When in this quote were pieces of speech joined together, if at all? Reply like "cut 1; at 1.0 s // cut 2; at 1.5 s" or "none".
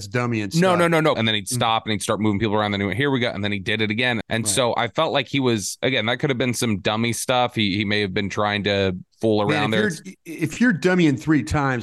cut 1; at 1.1 s // cut 2; at 4.2 s